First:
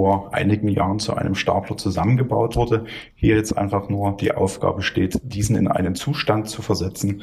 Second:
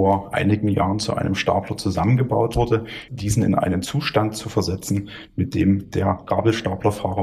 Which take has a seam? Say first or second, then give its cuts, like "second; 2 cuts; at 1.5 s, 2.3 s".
second; 1 cut; at 3.1 s